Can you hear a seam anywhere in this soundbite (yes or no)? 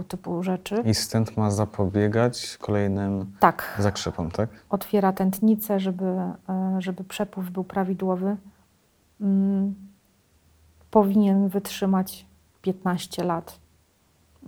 no